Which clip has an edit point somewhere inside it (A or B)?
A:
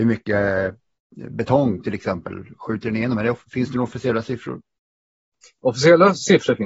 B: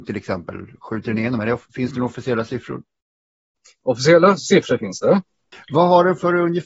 B